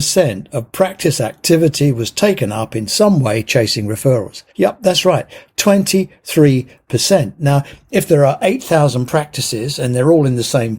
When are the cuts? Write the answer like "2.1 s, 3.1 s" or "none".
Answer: 4.5 s